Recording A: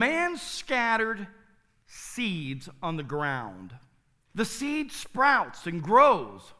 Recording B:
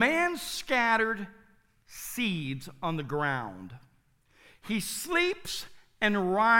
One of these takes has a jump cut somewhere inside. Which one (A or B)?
A